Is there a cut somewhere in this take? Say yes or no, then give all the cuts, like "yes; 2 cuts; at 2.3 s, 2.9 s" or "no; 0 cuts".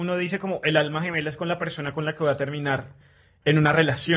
no; 0 cuts